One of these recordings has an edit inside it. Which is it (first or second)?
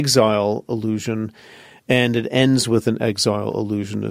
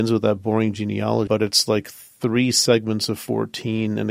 second